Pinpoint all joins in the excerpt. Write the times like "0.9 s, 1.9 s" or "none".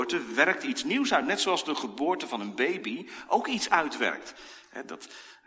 none